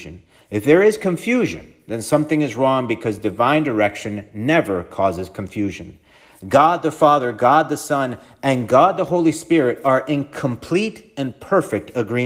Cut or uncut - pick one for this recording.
uncut